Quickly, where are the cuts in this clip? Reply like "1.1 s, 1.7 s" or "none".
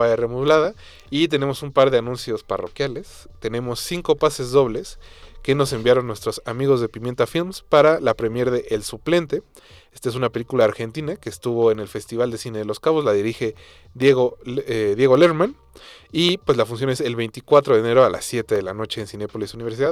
none